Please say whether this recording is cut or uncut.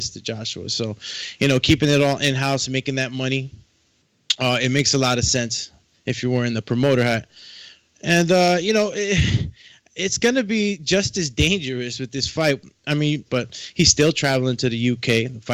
cut